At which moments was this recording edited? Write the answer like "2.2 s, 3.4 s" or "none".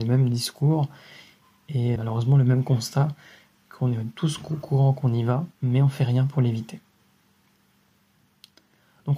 2.0 s, 5.6 s